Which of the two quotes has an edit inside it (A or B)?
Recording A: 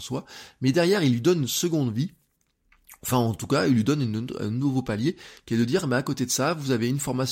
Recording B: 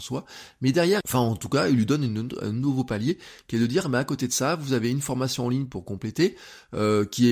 B